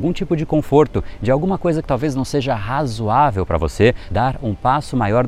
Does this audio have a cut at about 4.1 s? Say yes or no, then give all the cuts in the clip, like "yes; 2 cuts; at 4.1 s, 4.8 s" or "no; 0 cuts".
yes; 1 cut; at 4.1 s